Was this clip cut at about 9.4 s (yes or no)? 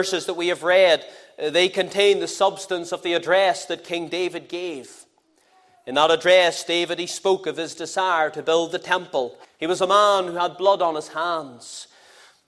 yes